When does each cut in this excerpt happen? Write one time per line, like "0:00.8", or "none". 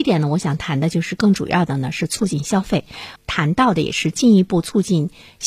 0:03.2